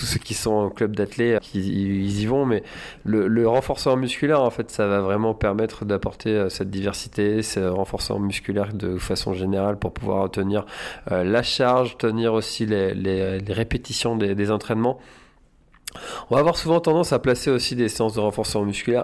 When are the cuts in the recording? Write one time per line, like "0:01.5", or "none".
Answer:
0:01.4